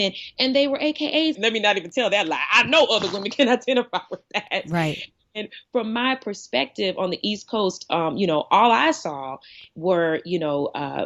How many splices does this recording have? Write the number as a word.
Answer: one